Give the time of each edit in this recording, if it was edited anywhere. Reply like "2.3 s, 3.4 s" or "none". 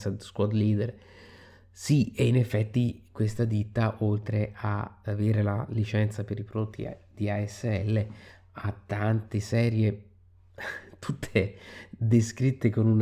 5.0 s